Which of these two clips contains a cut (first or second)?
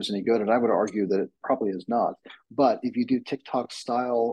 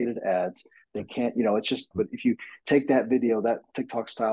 second